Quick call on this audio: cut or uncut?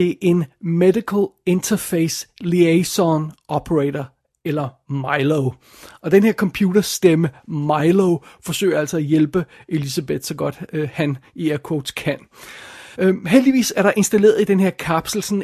cut